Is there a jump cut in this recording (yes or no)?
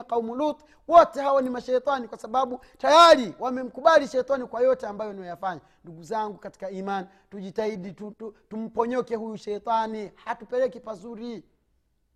yes